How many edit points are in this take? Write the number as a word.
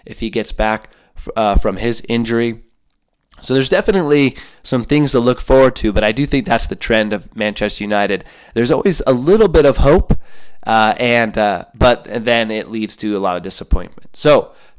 zero